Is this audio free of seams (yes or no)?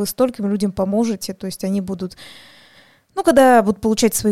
yes